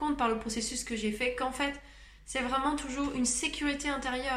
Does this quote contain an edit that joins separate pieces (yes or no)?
no